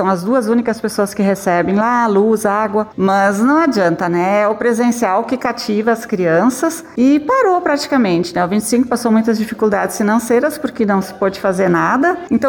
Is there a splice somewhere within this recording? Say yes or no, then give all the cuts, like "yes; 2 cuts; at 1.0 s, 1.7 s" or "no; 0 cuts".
yes; 1 cut; at 2.9 s